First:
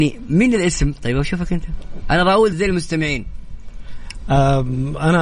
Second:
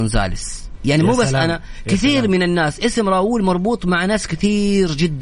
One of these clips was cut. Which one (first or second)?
first